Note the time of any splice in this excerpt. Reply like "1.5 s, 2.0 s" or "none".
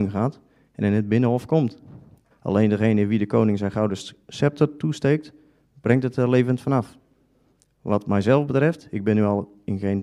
2.3 s